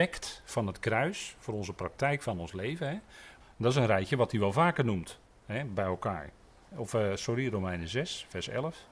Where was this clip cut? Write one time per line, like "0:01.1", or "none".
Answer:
0:03.4
0:06.7

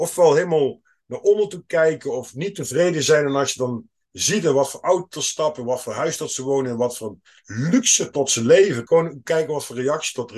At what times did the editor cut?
0:08.9

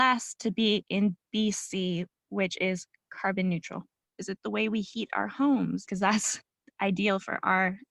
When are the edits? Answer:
0:02.1
0:04.0
0:05.9

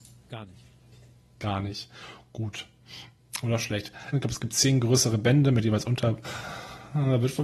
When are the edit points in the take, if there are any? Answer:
0:04.1
0:06.2

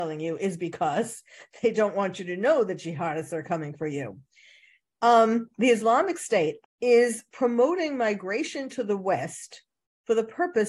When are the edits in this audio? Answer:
0:04.8
0:06.6

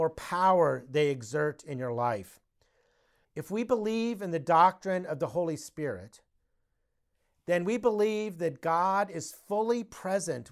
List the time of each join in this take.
0:03.2

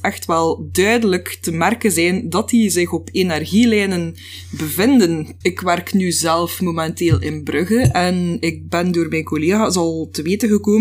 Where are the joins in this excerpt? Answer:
0:05.4

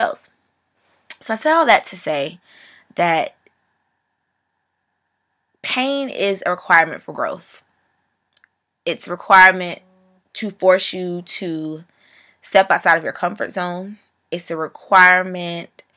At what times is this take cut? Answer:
none

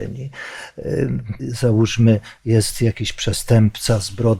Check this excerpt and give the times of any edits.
0:01.4

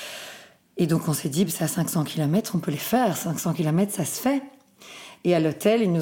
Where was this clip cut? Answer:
none

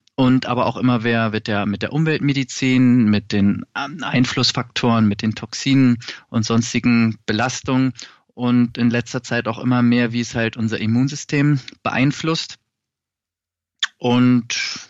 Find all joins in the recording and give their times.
none

